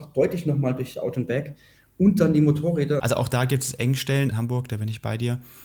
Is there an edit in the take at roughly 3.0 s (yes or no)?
yes